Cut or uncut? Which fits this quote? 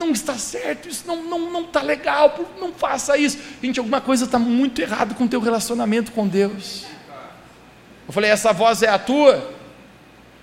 cut